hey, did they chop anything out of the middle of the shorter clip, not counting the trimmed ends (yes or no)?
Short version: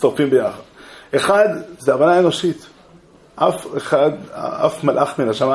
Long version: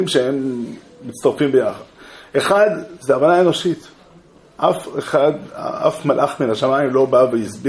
no